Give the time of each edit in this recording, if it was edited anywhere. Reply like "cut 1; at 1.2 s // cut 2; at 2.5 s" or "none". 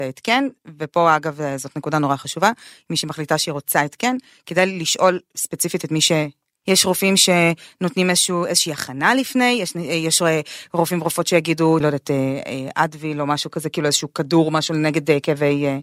cut 1; at 6.6 s // cut 2; at 11.8 s